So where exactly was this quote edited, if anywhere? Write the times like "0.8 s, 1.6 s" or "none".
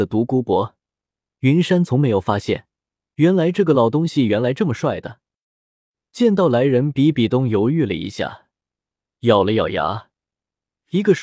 none